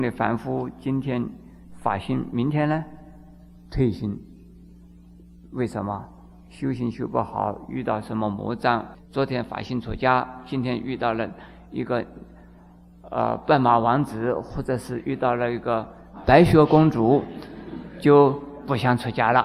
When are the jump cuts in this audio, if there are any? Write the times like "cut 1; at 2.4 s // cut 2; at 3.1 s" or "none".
cut 1; at 8.9 s